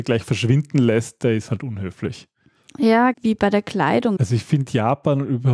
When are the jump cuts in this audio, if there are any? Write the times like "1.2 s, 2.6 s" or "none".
3.1 s, 4.2 s